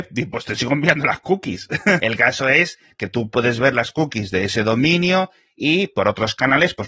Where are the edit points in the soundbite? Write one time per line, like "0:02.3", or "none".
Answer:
0:02.0